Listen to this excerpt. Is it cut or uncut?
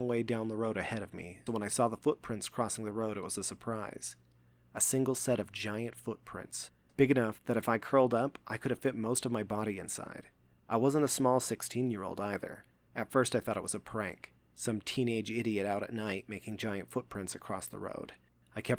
cut